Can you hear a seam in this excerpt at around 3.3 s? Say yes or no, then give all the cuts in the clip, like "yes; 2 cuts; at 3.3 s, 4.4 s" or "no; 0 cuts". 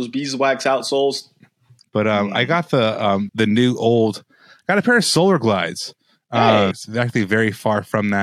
yes; 3 cuts; at 1.8 s, 3.3 s, 6.7 s